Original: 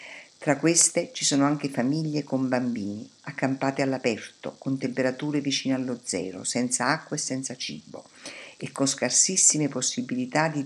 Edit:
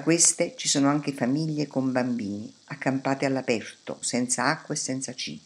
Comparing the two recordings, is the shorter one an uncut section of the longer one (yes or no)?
no